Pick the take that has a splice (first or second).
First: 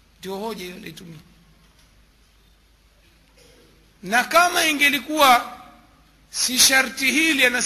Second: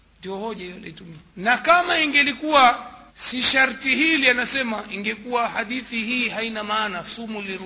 second